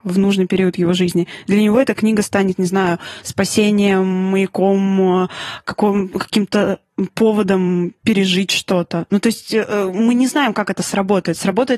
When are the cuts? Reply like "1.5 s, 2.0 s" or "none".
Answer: none